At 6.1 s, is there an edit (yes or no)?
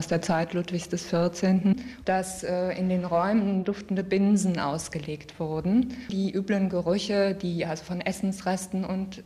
yes